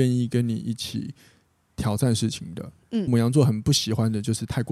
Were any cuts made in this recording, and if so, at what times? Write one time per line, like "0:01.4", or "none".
0:03.1

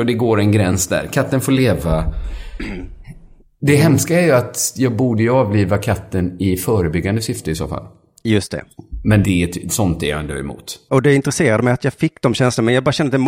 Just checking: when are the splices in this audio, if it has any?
0:09.2
0:10.9

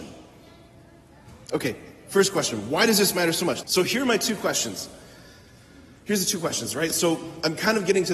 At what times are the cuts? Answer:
0:03.6

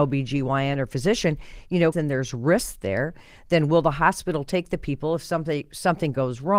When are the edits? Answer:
0:01.9

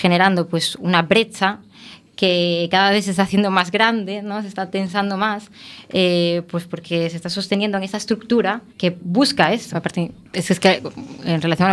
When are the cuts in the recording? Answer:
0:08.7
0:09.7

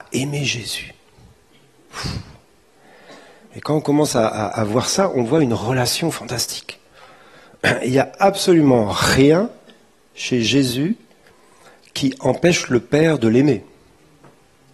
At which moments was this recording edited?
none

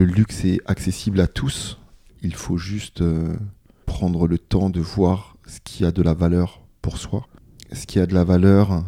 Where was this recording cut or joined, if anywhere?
none

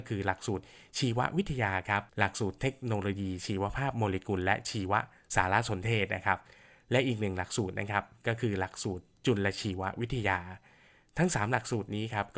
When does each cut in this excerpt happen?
0:02.1

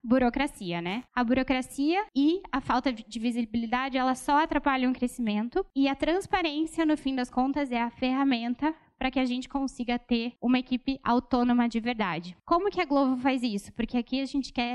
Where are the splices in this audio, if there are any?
0:01.1

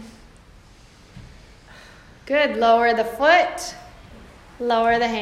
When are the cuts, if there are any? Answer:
none

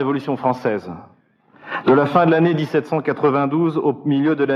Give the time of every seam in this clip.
none

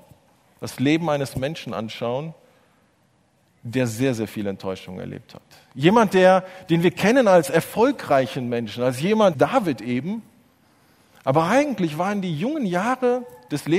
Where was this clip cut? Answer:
0:09.3

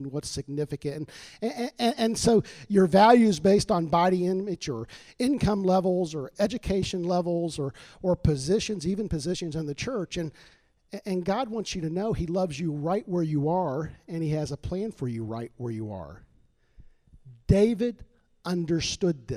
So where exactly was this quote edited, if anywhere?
none

